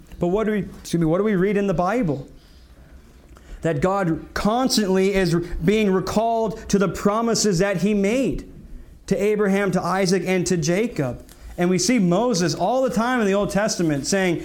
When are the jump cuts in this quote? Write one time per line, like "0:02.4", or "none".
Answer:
none

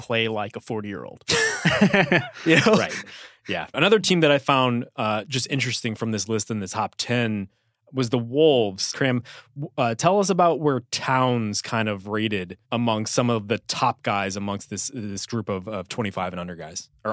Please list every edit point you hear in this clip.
0:03.7
0:08.9
0:12.6

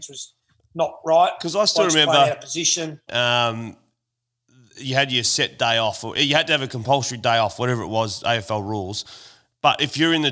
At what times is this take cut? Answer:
0:03.1

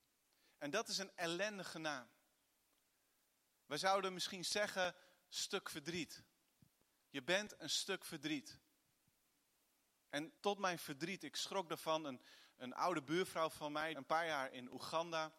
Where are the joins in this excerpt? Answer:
0:10.4
0:13.9

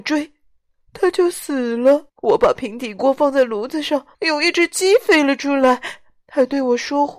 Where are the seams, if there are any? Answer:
0:02.1
0:04.1

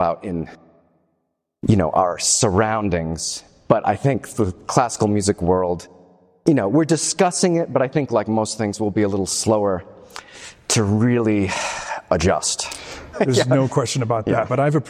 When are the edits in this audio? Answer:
0:13.1

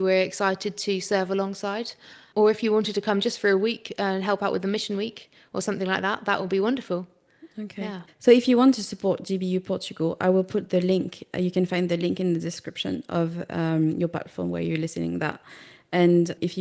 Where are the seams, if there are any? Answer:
0:08.1

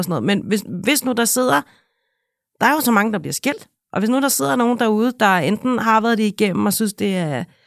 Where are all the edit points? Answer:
none

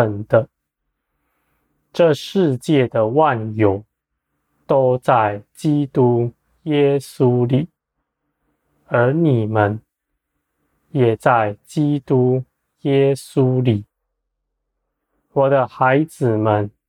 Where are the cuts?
none

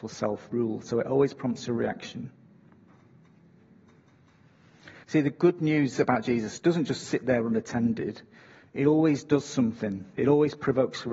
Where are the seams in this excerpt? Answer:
0:05.0

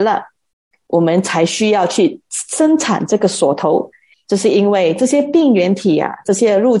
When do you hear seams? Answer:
0:04.1

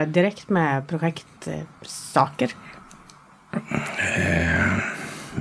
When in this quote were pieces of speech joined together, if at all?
none

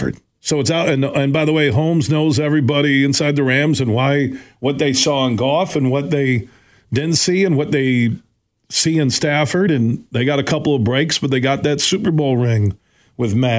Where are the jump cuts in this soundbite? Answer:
none

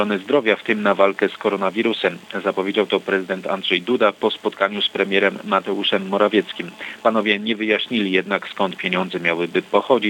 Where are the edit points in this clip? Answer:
none

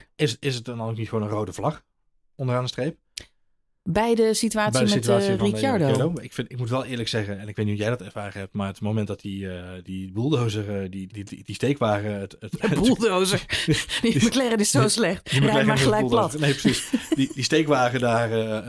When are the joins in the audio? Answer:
0:11.1

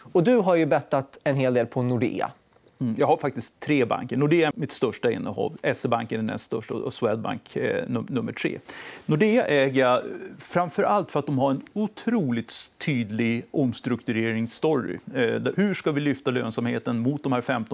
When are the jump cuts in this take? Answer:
0:04.5
0:15.5

